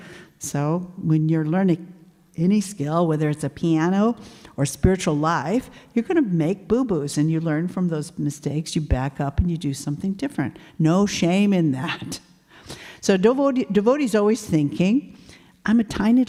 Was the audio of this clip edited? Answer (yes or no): no